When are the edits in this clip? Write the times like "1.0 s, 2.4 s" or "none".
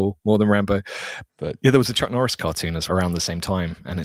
1.3 s, 2.9 s